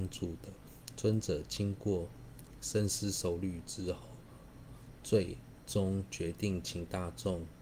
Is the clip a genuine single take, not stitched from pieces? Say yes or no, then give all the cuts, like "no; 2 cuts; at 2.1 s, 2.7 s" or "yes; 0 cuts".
yes; 0 cuts